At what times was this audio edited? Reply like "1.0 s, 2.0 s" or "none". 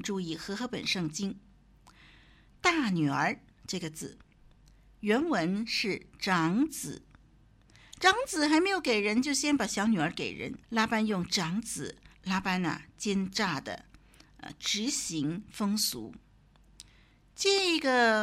10.6 s, 12.1 s